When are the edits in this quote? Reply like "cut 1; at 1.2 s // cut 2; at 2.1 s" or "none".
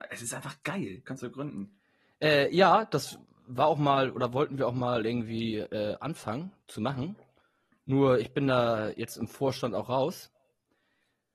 cut 1; at 1.0 s

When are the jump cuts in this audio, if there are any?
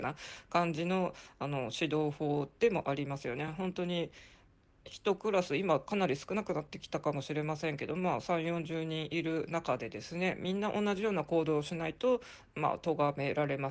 none

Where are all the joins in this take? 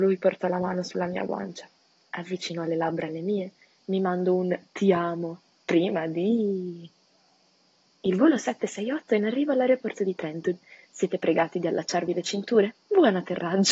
none

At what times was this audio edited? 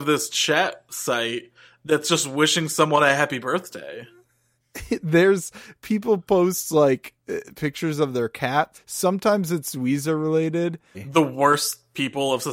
cut 1; at 8.7 s // cut 2; at 10.9 s

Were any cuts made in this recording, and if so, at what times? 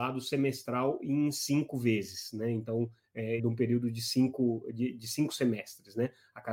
cut 1; at 3.4 s

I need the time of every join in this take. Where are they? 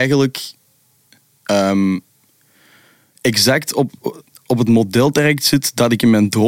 none

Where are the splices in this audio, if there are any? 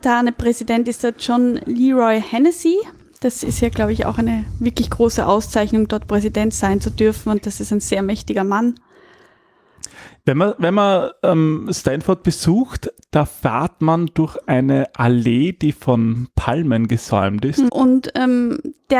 cut 1; at 17.7 s

